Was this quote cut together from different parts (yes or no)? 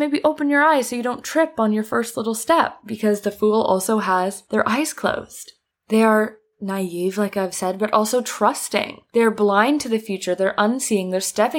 no